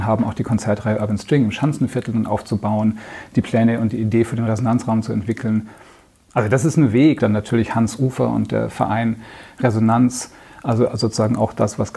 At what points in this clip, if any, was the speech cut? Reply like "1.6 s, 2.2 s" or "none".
7.2 s